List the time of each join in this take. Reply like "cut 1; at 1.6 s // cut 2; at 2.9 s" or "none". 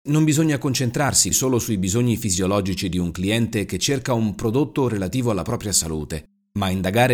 cut 1; at 1.3 s